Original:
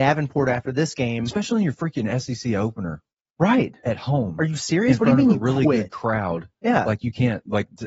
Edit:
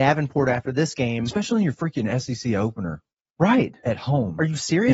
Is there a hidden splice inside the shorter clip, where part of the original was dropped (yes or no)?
no